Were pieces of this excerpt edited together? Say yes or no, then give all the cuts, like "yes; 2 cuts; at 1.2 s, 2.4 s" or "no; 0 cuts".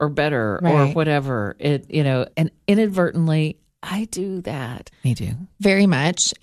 yes; 2 cuts; at 2.3 s, 4.9 s